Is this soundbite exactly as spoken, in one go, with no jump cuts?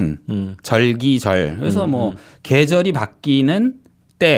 yes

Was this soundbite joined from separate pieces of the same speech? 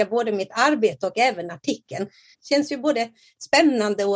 yes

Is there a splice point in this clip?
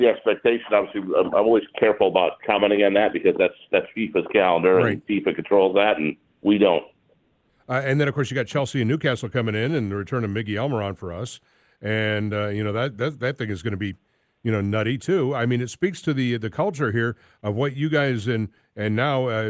no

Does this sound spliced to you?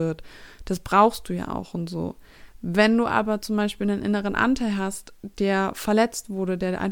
no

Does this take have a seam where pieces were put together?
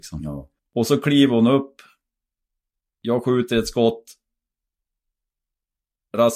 no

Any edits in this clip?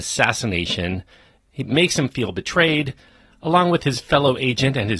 no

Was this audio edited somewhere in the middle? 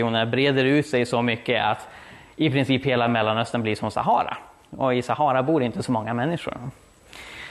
no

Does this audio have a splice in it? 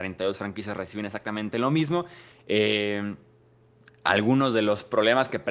yes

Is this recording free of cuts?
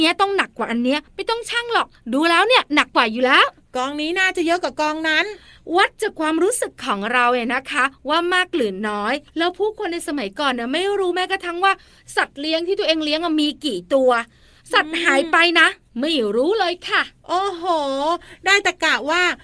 no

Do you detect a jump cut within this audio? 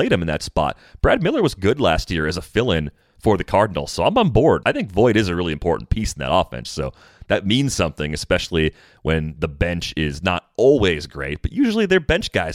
yes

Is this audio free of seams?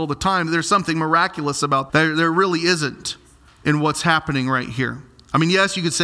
no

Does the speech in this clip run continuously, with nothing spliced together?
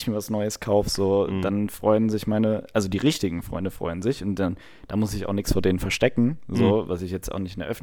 yes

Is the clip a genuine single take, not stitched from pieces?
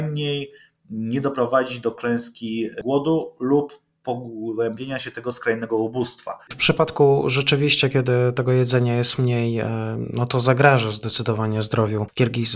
no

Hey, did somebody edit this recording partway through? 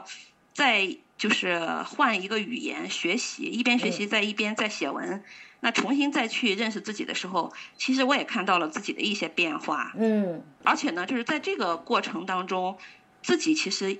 no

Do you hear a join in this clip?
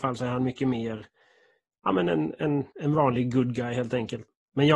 no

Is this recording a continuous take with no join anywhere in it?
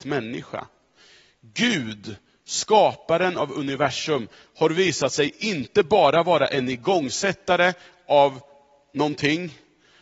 yes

